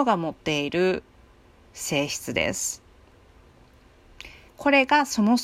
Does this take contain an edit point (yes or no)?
yes